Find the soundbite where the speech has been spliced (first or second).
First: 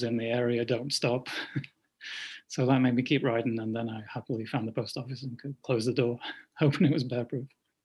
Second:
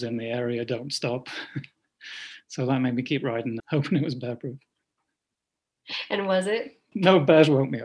second